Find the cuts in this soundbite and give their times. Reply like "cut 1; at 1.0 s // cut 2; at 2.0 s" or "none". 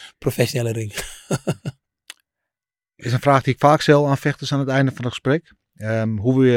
none